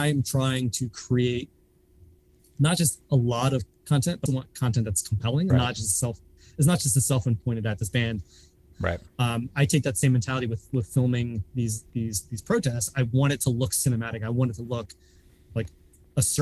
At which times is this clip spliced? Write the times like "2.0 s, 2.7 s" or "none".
4.3 s, 5.5 s, 8.7 s